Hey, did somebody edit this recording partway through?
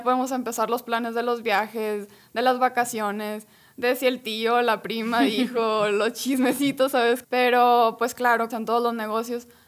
yes; 2 cuts; at 7.2 s, 8.5 s

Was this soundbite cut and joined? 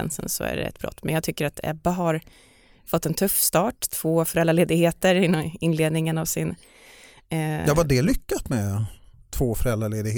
no; 0 cuts

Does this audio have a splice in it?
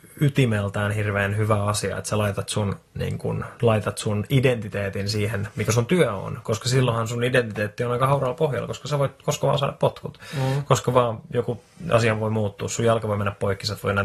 no; 0 cuts

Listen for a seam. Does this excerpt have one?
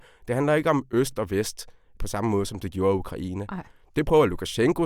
no; 0 cuts

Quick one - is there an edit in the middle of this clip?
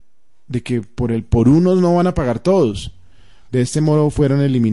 yes; 1 cut; at 3.5 s

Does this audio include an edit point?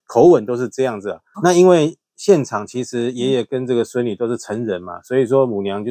yes; 1 cut; at 1.3 s

